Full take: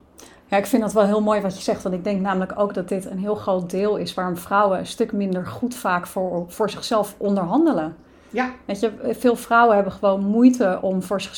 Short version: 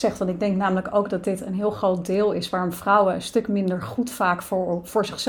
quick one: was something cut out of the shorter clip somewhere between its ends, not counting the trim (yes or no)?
no